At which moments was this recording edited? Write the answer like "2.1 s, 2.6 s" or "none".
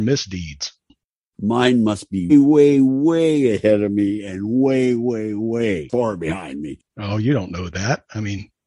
2.3 s, 6.9 s